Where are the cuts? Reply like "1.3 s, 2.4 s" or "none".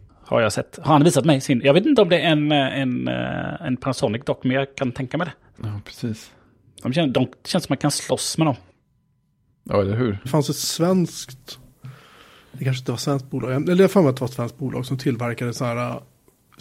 5.5 s, 10.2 s